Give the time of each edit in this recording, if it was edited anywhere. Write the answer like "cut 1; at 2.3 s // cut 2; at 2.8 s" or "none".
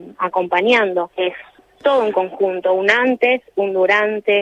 cut 1; at 1.1 s